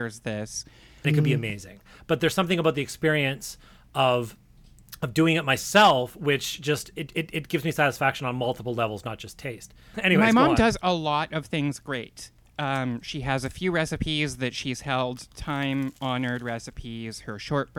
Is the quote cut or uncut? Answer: cut